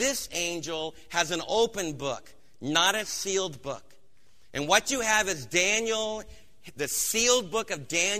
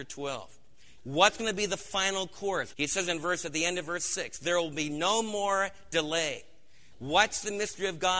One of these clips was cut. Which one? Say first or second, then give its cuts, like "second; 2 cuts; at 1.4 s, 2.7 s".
second; 3 cuts; at 1.0 s, 2.7 s, 6.9 s